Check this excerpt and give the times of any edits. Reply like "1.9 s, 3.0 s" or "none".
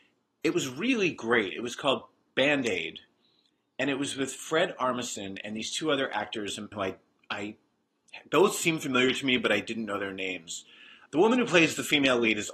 6.7 s, 11.1 s

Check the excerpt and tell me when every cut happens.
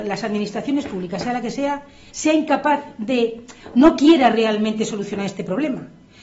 2.1 s

